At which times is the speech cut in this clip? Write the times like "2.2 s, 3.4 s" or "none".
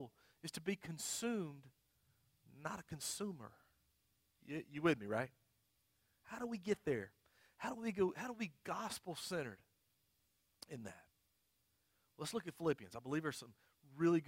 none